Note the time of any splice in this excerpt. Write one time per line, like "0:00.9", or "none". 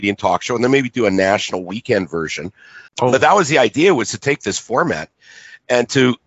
0:02.9